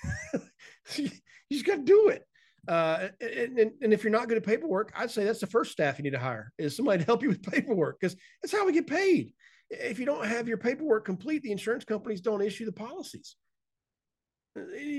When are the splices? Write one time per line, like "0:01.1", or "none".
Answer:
none